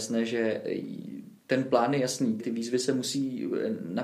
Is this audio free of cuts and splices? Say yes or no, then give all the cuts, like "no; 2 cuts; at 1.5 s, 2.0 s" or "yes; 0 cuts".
no; 1 cut; at 2.4 s